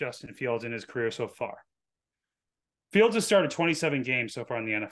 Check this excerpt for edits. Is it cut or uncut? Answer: uncut